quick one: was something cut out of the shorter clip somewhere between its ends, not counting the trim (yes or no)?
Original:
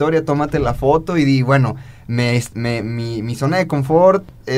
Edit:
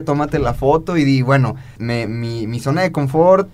yes